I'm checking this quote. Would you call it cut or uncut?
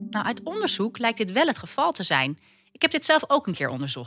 uncut